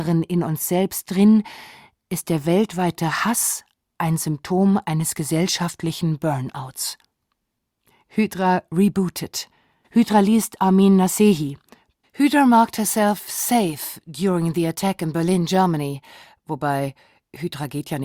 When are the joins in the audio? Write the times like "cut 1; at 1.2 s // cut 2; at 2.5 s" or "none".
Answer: cut 1; at 9.8 s // cut 2; at 12.0 s

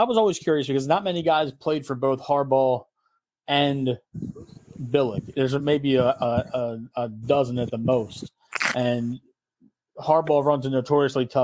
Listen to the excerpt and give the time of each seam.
none

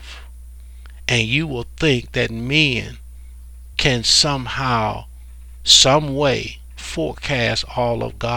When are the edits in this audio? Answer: cut 1; at 3.7 s

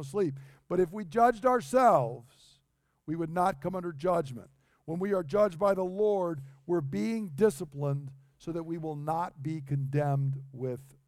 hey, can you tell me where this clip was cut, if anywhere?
none

